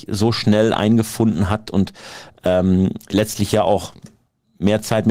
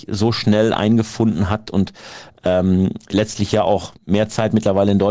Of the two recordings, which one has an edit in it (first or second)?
second